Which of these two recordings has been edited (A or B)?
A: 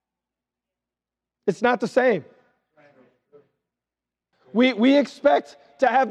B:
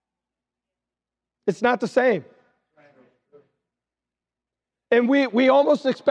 A